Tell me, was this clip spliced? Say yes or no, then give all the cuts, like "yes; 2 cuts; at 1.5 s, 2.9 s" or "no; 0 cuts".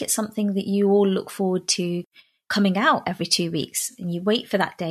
no; 0 cuts